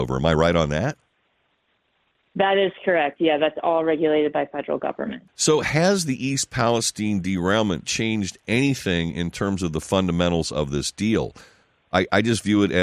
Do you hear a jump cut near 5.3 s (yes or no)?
yes